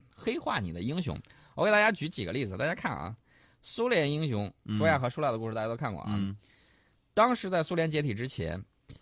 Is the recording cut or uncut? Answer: uncut